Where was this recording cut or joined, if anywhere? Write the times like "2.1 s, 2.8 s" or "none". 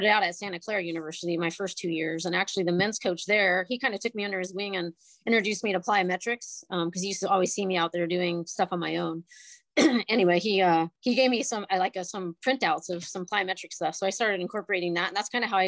10.9 s